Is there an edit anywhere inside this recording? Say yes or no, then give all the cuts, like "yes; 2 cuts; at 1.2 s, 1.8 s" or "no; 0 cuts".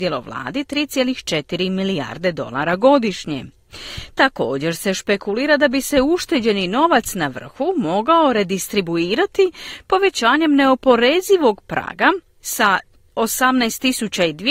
no; 0 cuts